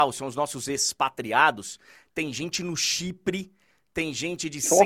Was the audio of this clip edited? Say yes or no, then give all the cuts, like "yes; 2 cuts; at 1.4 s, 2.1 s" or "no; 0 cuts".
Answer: no; 0 cuts